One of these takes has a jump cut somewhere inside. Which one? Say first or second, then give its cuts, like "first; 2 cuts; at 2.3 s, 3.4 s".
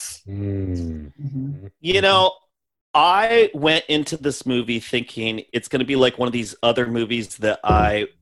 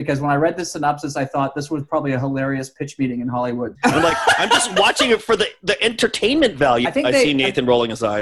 second; 2 cuts; at 3.7 s, 6.8 s